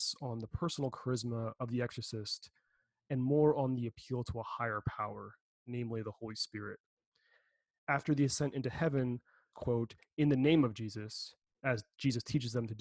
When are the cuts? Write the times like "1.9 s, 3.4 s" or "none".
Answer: 9.5 s